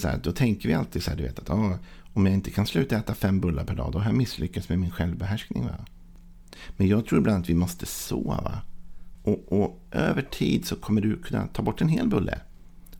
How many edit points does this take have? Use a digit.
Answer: 1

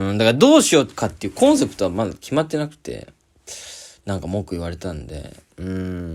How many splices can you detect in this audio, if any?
0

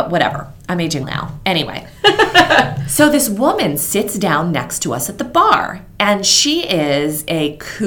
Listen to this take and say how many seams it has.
1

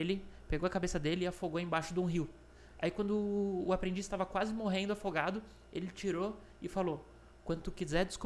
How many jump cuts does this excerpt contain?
0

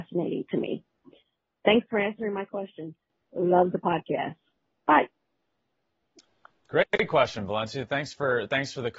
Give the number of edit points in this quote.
0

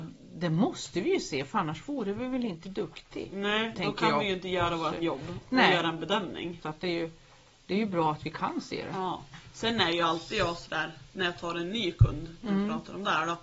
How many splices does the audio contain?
1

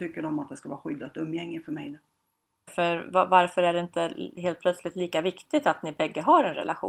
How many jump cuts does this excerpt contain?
1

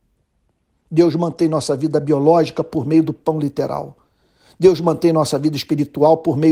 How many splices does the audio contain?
0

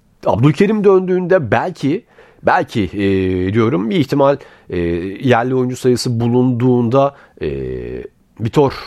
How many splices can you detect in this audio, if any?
0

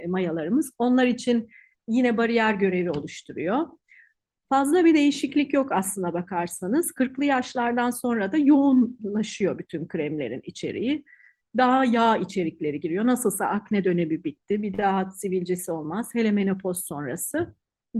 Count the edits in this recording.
0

